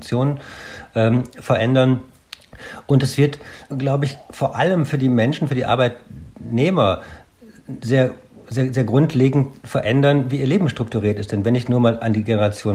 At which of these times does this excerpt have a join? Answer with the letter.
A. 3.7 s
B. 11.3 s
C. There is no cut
A